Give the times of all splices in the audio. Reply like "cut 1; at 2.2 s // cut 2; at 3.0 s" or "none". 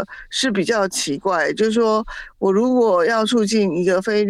none